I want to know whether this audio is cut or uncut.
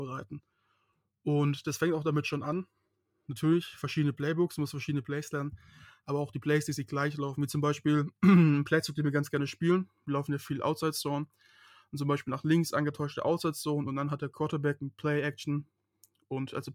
uncut